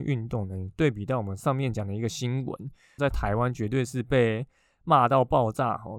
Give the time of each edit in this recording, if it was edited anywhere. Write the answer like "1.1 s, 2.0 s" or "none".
3.0 s

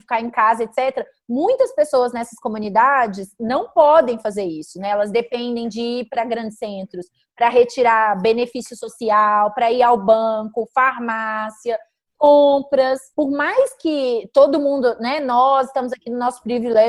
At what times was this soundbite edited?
13.1 s

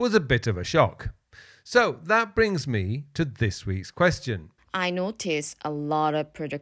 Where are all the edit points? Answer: 4.6 s

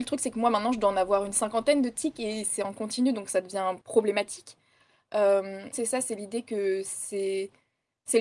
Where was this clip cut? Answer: 3.8 s, 5.7 s

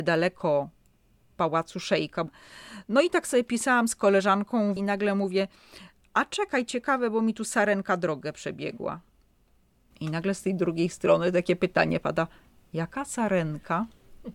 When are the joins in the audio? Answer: 4.8 s

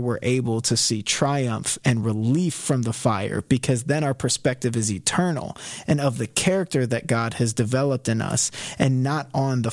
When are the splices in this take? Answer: none

